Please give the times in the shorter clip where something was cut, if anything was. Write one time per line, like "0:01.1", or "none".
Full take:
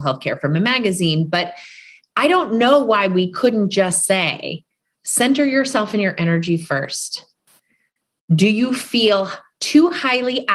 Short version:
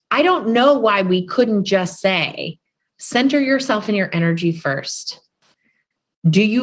none